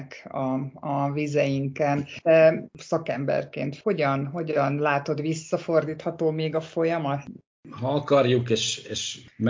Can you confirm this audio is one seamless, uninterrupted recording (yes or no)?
yes